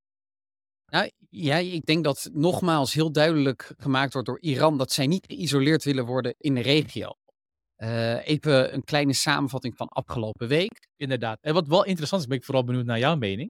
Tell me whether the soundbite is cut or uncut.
cut